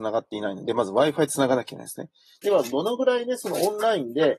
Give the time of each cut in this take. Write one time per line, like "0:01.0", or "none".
0:02.4